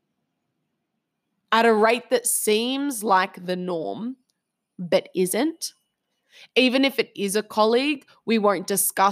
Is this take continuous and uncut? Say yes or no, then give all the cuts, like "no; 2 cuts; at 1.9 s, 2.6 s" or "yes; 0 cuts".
yes; 0 cuts